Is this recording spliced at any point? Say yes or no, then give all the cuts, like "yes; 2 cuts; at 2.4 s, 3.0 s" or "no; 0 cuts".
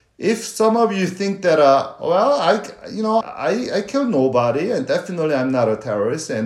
yes; 1 cut; at 3.2 s